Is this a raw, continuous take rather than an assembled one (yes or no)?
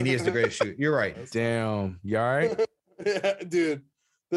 no